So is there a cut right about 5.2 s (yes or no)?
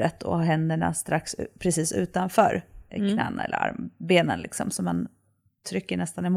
no